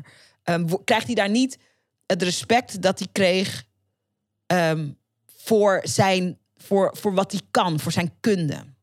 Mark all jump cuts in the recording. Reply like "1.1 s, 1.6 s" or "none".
none